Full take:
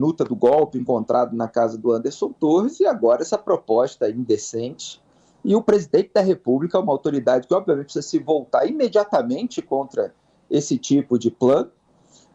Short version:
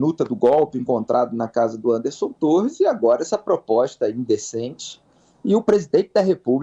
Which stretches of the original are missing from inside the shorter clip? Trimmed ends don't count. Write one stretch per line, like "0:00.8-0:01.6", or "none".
none